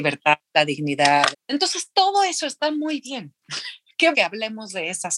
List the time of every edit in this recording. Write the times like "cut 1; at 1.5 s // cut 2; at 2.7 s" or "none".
cut 1; at 1.3 s // cut 2; at 4.1 s